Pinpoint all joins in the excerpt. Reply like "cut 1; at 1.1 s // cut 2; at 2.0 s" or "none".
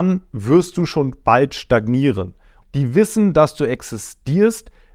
cut 1; at 2.6 s

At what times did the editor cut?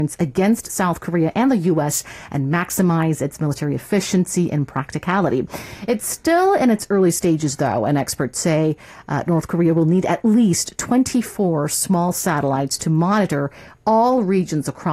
none

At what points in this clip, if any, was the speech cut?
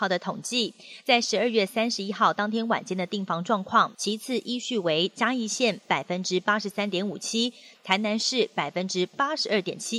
cut 1; at 3.9 s // cut 2; at 7.7 s

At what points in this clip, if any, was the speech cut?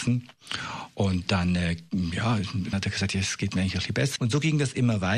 cut 1; at 2.7 s // cut 2; at 4.2 s

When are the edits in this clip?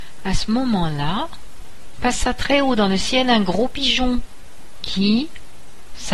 none

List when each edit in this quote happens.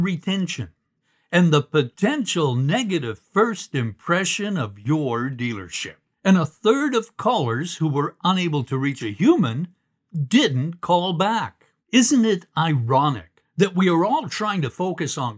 cut 1; at 6.1 s // cut 2; at 11.8 s

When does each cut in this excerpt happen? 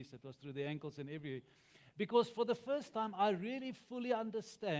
none

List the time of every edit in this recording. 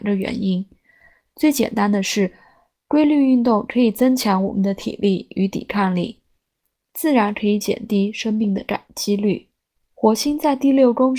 cut 1; at 9.9 s

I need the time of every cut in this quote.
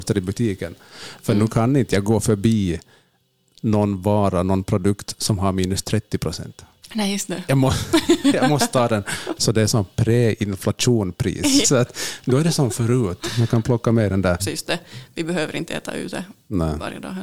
cut 1; at 9.4 s // cut 2; at 11.6 s // cut 3; at 14.4 s

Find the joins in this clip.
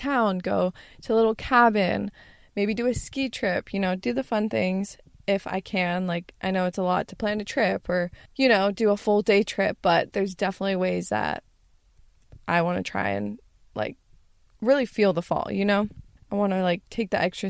cut 1; at 8.3 s // cut 2; at 16.2 s

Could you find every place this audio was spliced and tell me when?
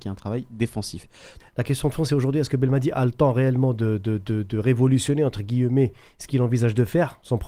cut 1; at 1.4 s

